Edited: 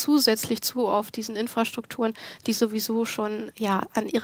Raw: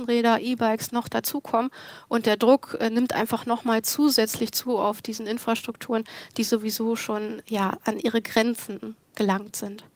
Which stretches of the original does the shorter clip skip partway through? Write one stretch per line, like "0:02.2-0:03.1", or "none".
none